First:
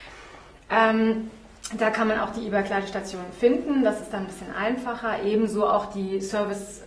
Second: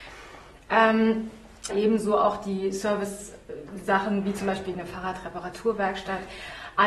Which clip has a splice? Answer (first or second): second